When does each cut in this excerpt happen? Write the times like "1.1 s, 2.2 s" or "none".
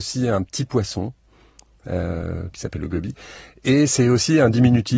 2.5 s